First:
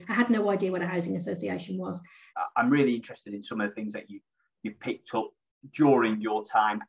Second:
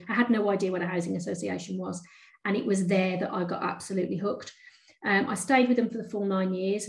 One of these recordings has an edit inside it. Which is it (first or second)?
first